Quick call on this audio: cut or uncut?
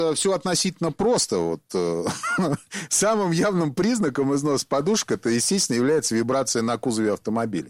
uncut